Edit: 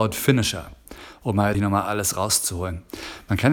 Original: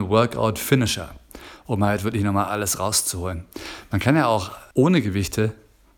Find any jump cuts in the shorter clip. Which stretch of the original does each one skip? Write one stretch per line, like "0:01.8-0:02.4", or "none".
0:02.0-0:02.2